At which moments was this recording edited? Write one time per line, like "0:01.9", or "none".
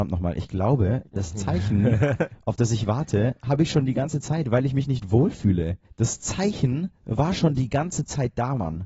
0:05.8